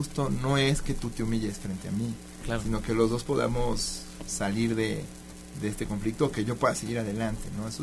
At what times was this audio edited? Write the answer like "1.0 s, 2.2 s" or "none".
none